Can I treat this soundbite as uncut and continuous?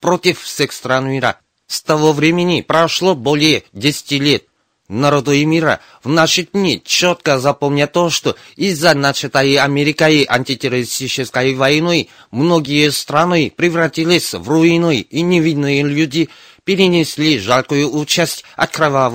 yes; 0 cuts

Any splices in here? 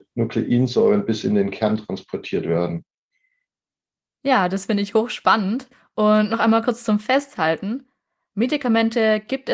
no; 0 cuts

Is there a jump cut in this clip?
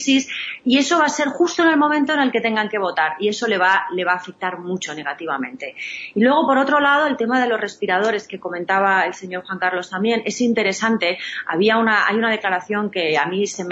no; 0 cuts

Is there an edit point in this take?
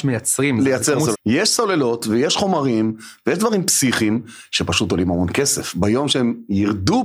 yes; 1 cut; at 1.1 s

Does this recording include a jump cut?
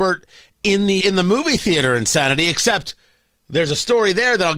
yes; 1 cut; at 1.0 s

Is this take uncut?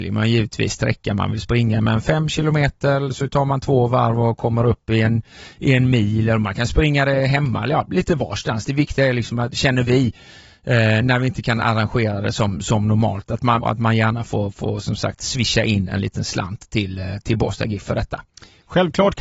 no; 1 cut; at 13.6 s

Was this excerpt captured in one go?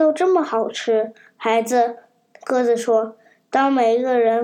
yes; 0 cuts

